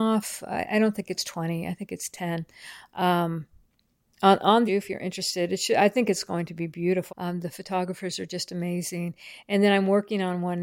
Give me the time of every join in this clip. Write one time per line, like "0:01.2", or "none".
0:04.7
0:07.1